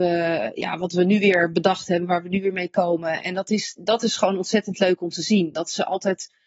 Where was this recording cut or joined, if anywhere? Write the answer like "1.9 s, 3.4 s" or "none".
none